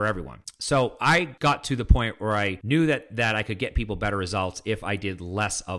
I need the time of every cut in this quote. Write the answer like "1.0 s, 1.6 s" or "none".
none

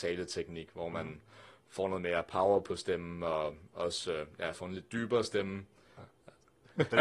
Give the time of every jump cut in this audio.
4.5 s, 6.0 s

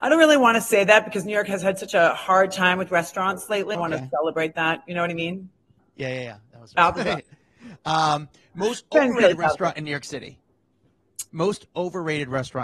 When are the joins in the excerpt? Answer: 3.7 s, 5.8 s, 11.3 s

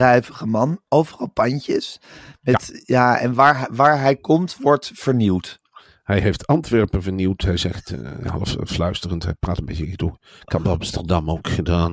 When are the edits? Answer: none

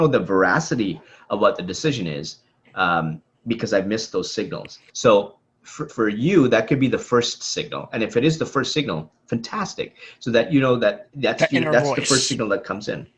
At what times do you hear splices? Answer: 4.9 s, 5.9 s

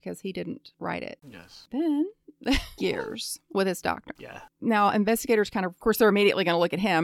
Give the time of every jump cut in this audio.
2.8 s

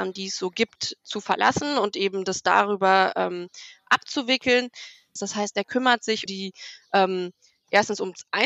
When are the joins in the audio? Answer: 5.2 s, 6.3 s

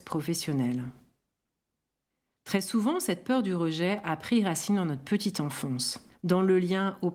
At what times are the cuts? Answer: 2.3 s

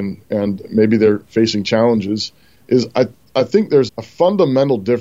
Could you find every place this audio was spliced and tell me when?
2.6 s, 3.9 s

